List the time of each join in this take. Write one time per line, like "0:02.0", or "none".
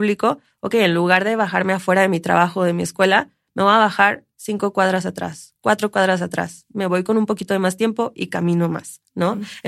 none